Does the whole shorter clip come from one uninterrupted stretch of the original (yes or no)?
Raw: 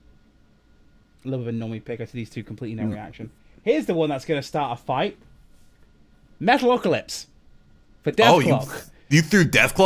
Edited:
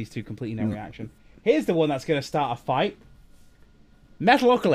yes